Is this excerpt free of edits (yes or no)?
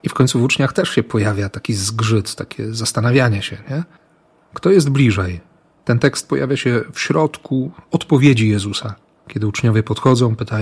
no